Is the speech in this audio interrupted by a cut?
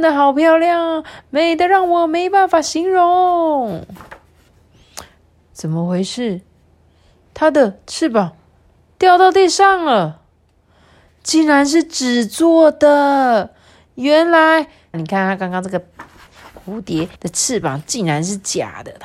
yes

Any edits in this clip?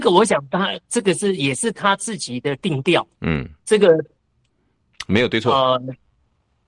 no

